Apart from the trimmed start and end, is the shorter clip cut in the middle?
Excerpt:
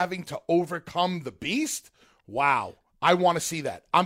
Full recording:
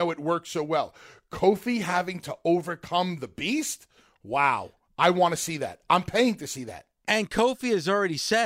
no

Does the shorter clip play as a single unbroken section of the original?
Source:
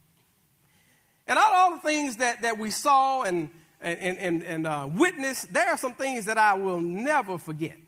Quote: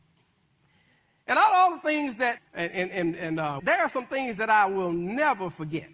no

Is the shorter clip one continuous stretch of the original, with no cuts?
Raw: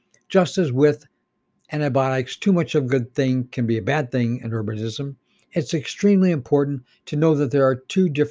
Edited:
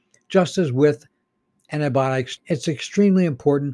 no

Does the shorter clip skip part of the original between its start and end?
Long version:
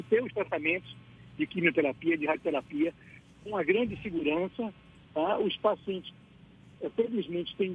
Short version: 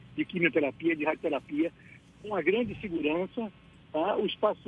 no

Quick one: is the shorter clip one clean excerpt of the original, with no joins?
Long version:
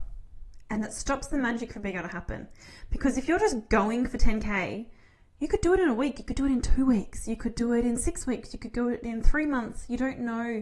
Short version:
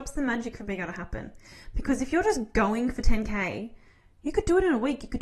yes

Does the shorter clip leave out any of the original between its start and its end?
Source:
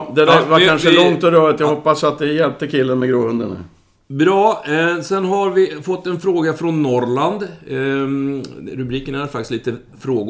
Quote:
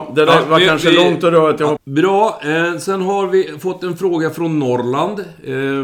yes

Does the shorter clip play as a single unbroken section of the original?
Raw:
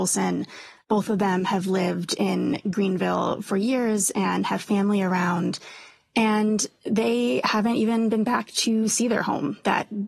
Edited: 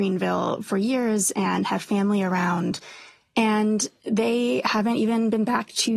yes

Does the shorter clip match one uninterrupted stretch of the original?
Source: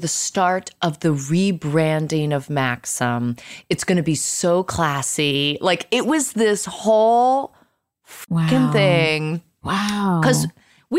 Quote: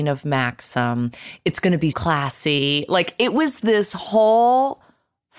no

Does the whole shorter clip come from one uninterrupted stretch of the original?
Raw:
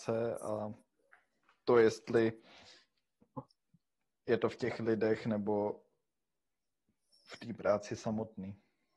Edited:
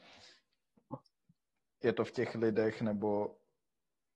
yes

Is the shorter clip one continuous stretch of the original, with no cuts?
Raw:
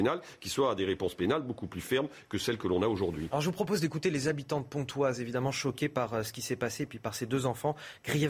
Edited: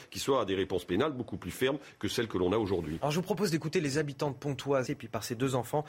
no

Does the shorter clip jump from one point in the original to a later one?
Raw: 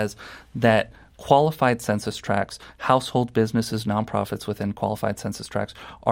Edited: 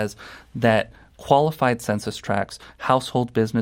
no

